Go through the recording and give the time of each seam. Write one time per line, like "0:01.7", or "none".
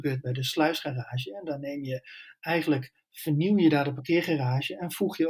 none